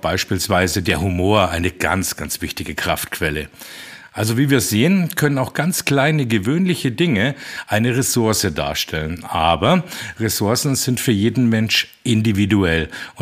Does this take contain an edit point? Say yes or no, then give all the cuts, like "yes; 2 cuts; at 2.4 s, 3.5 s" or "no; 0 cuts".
no; 0 cuts